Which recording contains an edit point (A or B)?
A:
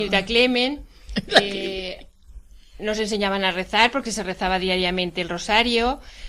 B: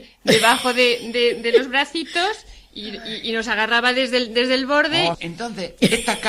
B